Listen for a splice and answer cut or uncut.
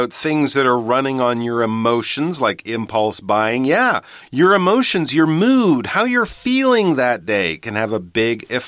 uncut